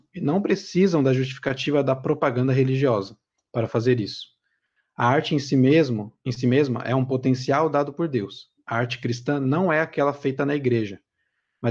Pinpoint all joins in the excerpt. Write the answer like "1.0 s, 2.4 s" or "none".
none